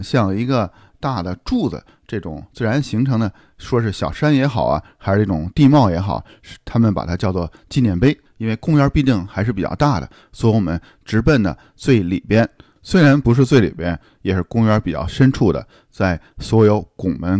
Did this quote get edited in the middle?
yes; 1 cut; at 8.3 s

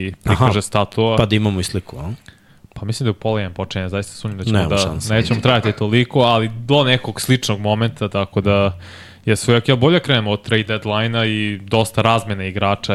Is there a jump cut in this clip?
no; 0 cuts

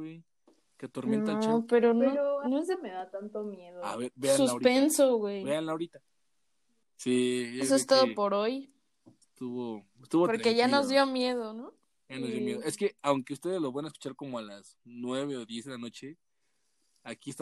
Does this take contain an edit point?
yes; 1 cut; at 6.8 s

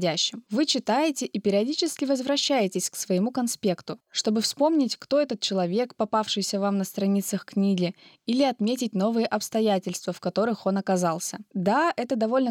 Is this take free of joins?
yes; 0 cuts

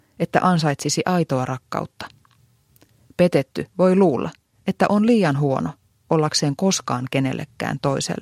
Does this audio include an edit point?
no; 0 cuts

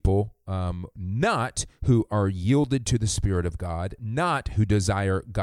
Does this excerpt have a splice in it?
no; 0 cuts

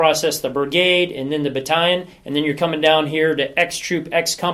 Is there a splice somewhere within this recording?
no; 0 cuts

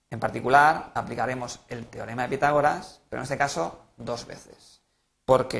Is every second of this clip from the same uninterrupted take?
yes; 0 cuts

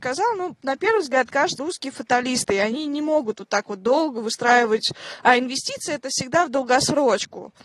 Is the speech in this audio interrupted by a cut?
yes; 1 cut; at 1.6 s

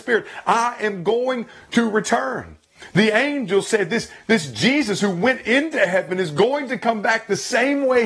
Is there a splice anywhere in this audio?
no; 0 cuts

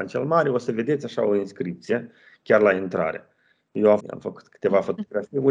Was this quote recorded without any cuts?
no; 1 cut; at 4.0 s

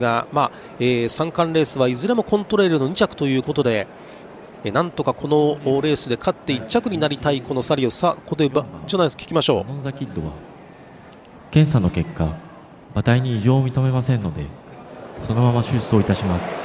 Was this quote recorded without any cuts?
no; 1 cut; at 4.6 s

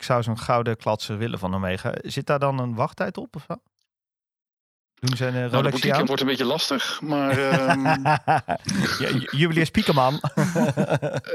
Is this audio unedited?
no; 1 cut; at 6.1 s

